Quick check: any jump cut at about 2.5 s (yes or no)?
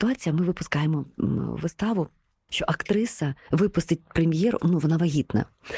yes